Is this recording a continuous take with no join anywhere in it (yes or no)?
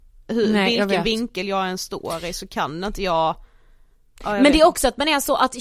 yes